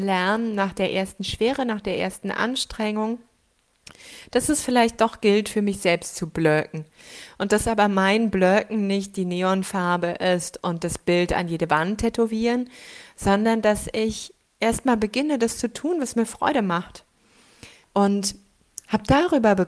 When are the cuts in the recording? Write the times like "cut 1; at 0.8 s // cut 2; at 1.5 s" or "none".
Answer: cut 1; at 17.8 s

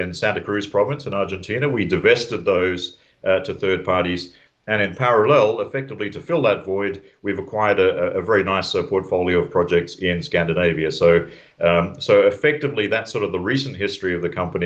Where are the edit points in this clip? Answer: none

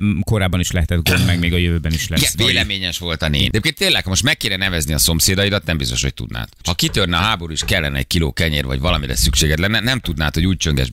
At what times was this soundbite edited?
none

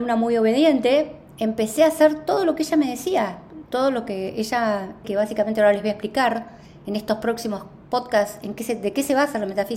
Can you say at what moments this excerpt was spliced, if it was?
cut 1; at 5.0 s

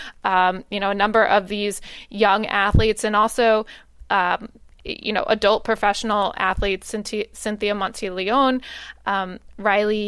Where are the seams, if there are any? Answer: none

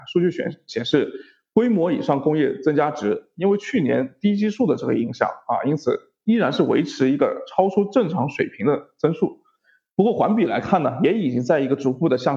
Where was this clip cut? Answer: none

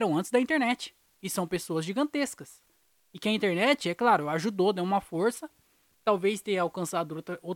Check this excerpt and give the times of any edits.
none

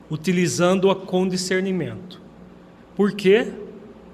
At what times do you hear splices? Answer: none

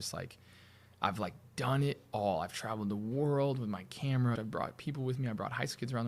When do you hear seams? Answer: cut 1; at 4.4 s

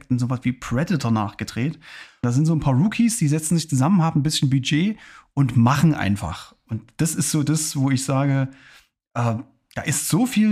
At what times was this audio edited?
cut 1; at 2.2 s

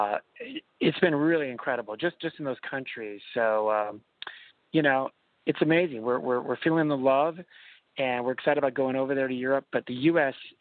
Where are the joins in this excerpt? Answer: none

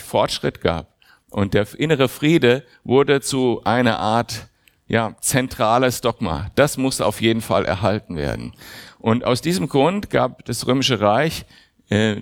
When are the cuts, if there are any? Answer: none

